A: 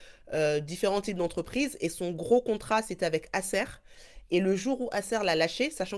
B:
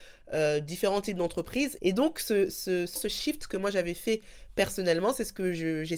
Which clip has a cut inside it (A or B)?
B